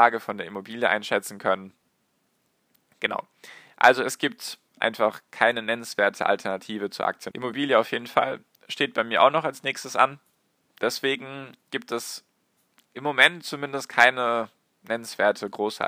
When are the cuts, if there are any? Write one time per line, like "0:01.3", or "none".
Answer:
0:07.3
0:10.7